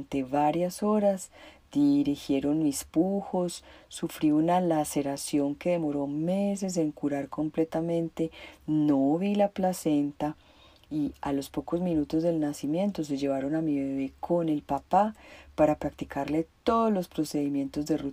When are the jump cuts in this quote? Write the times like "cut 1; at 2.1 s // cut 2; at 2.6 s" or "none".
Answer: none